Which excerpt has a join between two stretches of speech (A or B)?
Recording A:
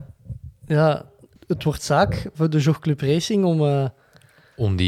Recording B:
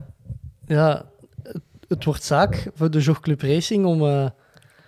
A